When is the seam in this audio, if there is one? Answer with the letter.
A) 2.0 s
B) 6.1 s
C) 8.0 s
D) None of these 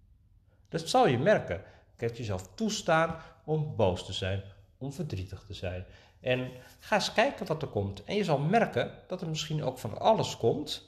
A